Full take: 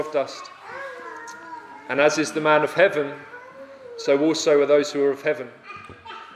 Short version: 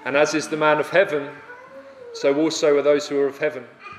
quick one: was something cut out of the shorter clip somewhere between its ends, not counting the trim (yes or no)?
no